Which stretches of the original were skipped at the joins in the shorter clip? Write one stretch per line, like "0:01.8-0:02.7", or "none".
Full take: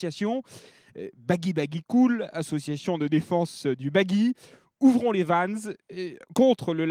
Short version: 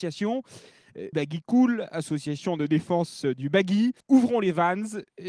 0:01.1-0:01.5
0:04.4-0:04.7